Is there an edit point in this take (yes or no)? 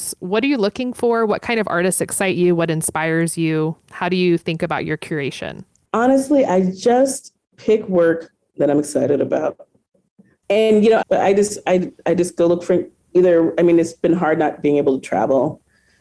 yes